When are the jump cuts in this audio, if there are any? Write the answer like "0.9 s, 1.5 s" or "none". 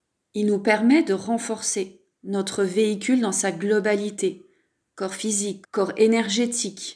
5.6 s